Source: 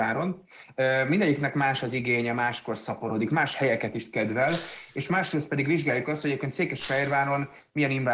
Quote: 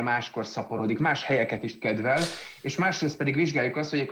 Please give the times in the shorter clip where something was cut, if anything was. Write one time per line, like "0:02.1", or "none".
none